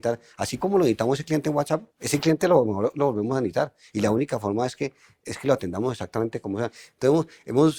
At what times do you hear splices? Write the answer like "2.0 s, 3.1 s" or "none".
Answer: 1.9 s